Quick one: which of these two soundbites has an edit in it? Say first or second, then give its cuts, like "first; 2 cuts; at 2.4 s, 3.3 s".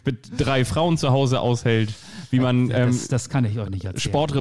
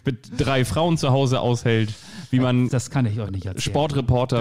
second; 1 cut; at 2.7 s